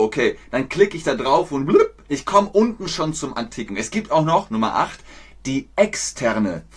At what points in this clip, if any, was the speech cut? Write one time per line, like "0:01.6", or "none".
0:03.7